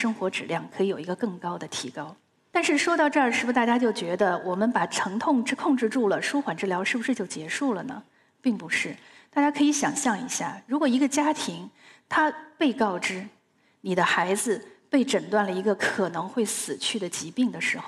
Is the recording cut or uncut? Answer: uncut